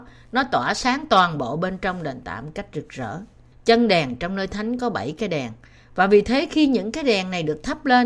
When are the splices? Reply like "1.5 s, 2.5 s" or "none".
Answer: 3.5 s